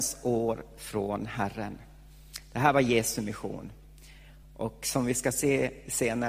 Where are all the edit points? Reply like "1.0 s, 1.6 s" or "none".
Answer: none